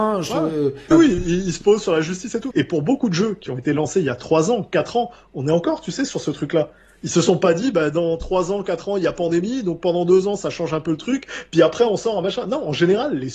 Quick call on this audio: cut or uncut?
cut